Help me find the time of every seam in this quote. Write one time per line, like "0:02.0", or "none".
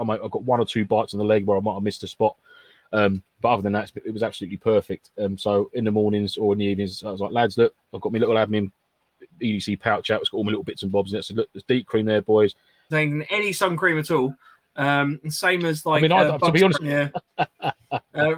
0:12.9
0:16.7